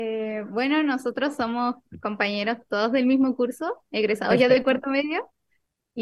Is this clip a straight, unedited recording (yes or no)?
yes